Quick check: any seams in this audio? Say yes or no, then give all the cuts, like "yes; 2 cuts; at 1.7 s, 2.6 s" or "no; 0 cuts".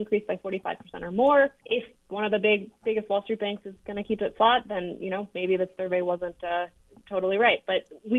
yes; 1 cut; at 1.6 s